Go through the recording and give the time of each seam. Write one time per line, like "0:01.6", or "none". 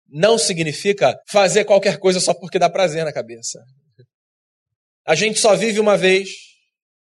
0:01.2
0:05.0